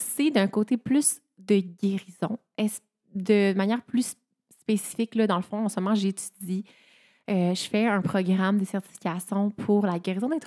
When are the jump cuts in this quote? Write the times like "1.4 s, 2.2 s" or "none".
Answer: none

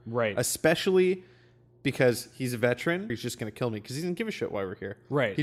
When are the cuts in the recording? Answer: 3.1 s

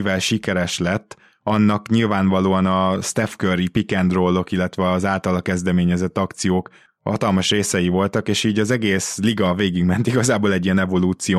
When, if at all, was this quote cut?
none

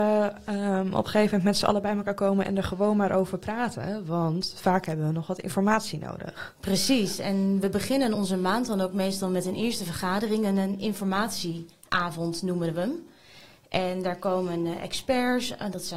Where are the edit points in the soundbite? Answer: 8.1 s

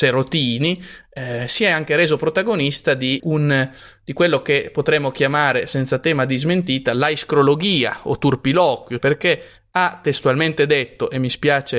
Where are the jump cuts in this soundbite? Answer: 3.2 s, 9.0 s

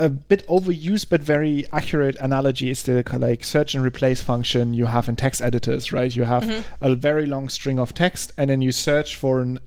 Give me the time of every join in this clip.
none

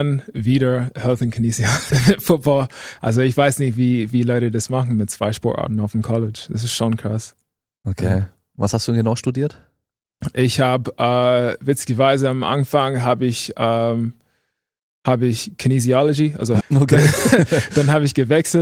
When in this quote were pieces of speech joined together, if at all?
1.9 s, 16.6 s

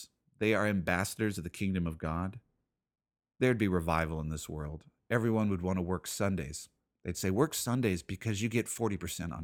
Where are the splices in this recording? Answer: none

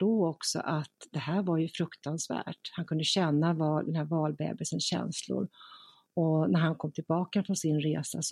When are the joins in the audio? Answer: none

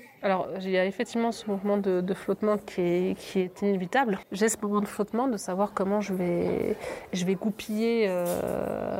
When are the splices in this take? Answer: 4.2 s

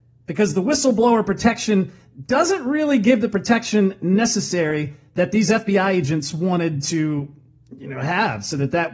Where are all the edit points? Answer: none

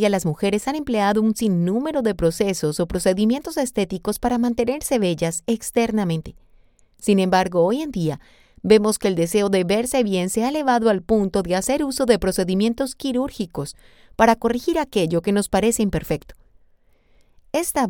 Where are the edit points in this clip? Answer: none

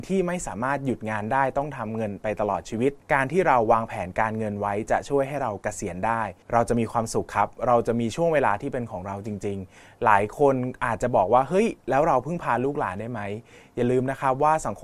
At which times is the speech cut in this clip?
3.0 s, 6.4 s

